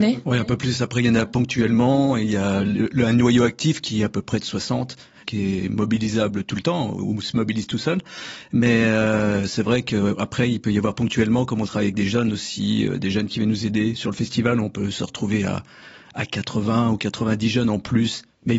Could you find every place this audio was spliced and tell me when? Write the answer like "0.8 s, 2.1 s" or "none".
none